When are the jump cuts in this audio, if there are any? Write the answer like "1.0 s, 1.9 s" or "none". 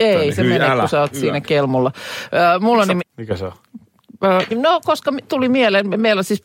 3.0 s, 4.5 s